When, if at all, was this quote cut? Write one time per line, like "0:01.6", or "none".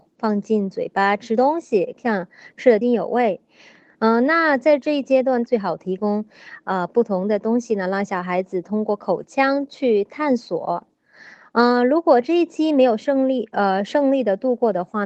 0:02.8
0:05.5